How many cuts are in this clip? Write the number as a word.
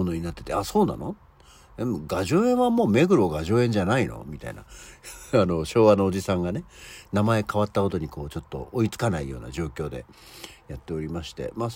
zero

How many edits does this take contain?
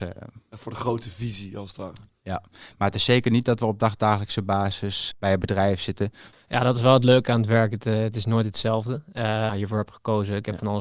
three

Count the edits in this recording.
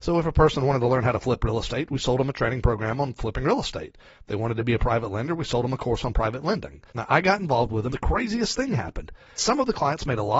three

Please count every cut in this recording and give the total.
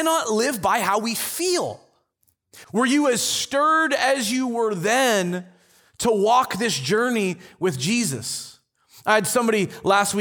one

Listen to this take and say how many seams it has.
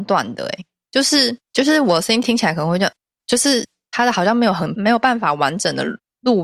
one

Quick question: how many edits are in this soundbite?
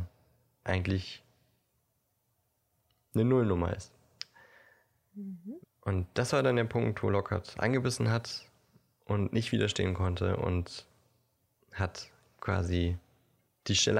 one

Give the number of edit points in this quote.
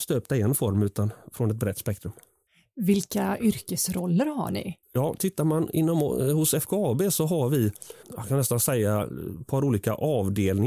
two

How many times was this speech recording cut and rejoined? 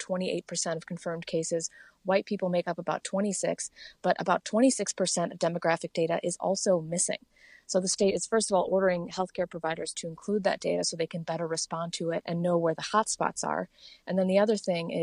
one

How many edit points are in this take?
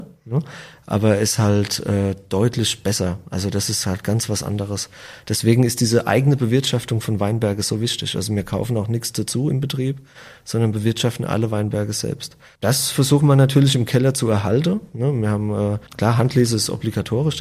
one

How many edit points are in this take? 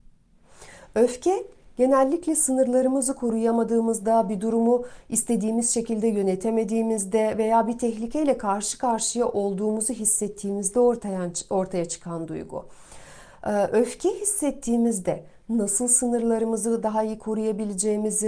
zero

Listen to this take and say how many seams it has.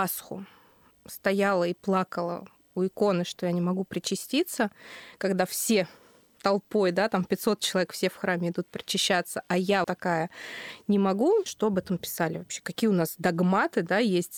two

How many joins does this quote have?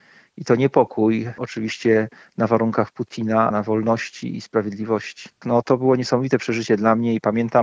two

